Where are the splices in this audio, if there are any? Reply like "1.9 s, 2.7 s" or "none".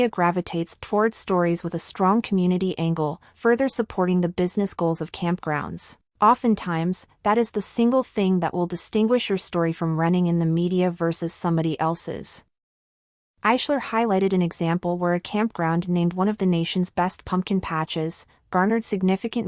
6.1 s